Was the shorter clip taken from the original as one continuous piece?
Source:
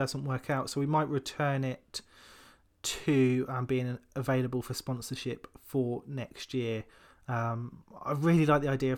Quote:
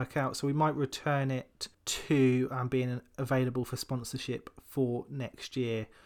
no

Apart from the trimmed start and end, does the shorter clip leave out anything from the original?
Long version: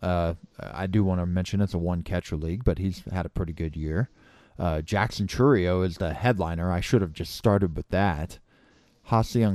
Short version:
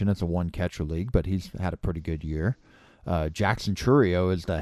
no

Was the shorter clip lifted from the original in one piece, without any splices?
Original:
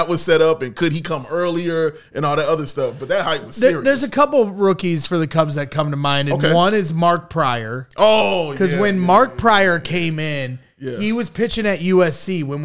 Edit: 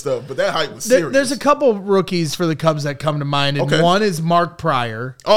yes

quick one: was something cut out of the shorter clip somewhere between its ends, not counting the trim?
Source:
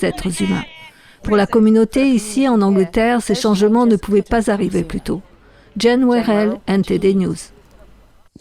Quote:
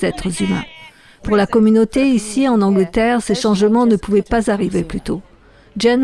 no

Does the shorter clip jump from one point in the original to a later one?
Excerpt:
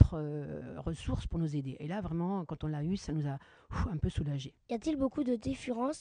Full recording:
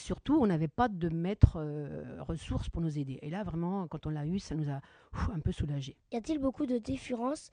no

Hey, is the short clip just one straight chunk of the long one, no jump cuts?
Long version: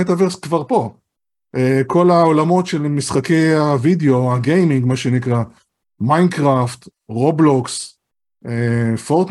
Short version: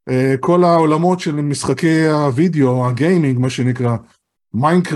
yes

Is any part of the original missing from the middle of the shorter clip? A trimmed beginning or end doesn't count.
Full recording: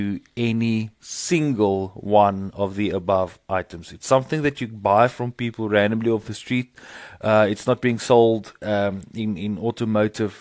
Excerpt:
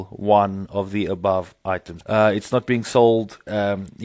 yes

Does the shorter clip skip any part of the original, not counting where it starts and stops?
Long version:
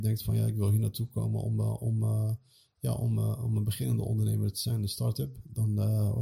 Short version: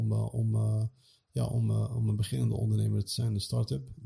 no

